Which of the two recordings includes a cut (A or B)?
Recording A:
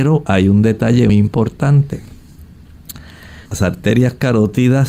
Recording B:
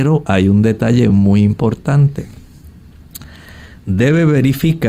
A